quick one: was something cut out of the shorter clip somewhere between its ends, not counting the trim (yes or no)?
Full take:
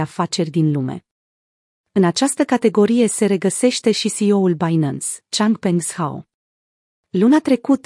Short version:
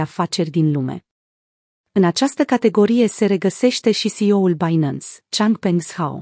no